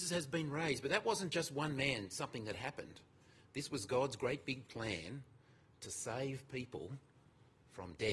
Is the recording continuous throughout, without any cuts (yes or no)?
yes